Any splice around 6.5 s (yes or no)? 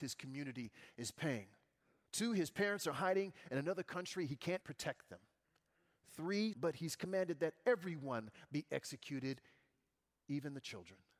yes